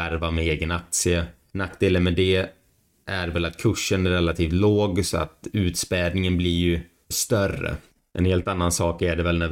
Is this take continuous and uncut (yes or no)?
no